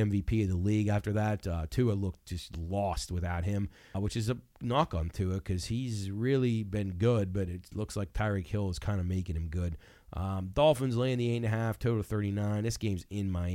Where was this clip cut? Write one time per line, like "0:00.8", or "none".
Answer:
0:03.9